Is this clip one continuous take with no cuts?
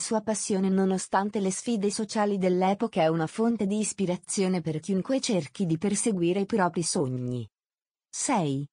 yes; 0 cuts

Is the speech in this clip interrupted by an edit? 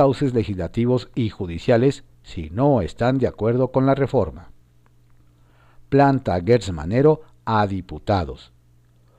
no; 0 cuts

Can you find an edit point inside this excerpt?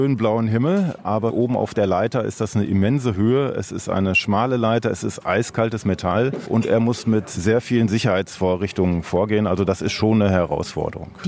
no; 0 cuts

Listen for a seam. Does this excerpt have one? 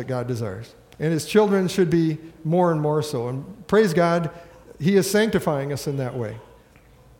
yes; 1 cut; at 0.9 s

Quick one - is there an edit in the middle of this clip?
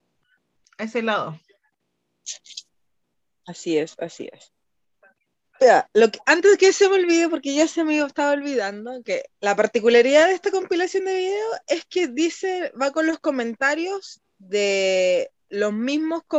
yes; 1 cut; at 9.3 s

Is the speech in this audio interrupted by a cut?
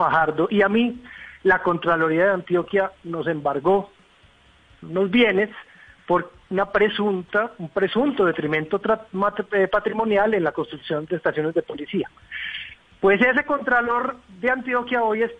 no; 0 cuts

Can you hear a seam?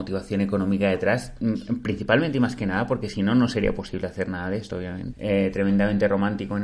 yes; 1 cut; at 5.1 s

